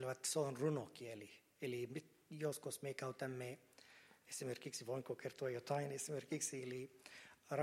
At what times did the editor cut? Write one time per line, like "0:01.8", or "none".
none

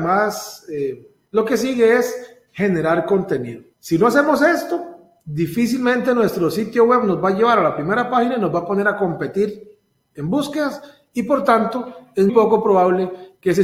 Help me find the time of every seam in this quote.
0:01.3
0:12.3

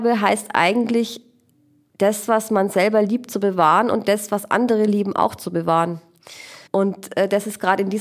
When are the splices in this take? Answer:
0:06.7

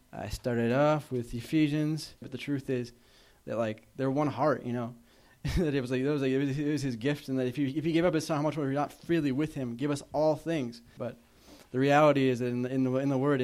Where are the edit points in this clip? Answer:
0:02.2
0:05.1
0:11.0

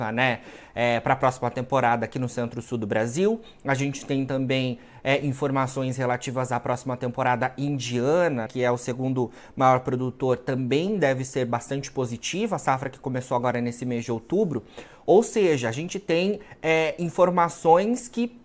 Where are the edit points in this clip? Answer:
0:08.5

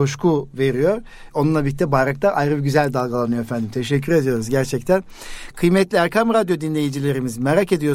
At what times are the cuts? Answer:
none

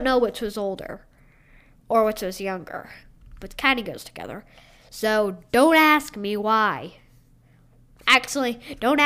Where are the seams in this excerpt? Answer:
none

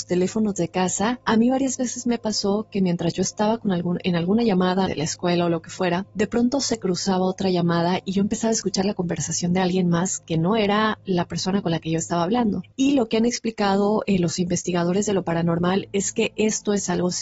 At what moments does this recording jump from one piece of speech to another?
0:04.9
0:12.7

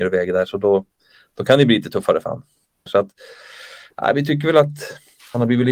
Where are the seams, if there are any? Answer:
0:02.9

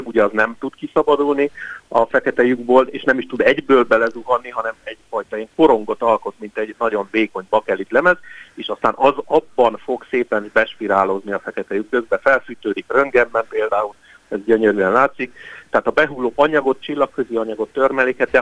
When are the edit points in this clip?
0:11.9

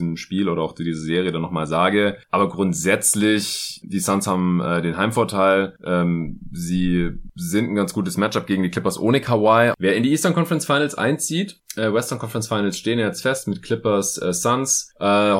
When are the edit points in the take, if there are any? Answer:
0:09.7

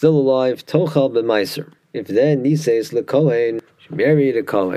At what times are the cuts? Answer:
0:01.8

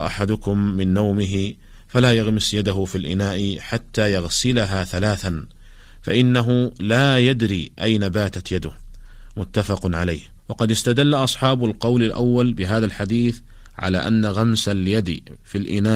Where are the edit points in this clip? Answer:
0:10.4

